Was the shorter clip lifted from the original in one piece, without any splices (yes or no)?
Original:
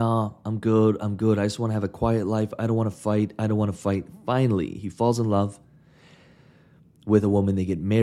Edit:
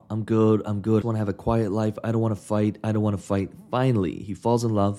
no